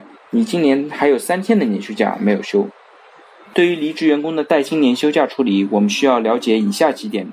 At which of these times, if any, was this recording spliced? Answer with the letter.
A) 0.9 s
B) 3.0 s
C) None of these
B